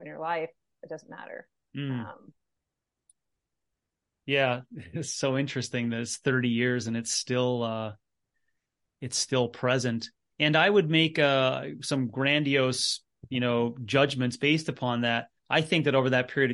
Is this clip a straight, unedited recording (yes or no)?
yes